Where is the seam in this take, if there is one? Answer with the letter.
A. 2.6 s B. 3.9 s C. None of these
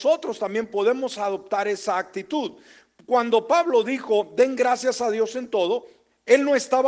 C